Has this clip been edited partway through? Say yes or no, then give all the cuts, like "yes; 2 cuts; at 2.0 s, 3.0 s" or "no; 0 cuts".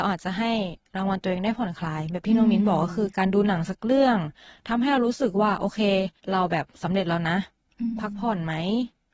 yes; 1 cut; at 6.2 s